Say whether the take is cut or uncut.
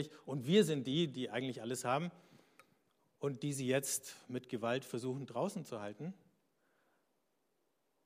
uncut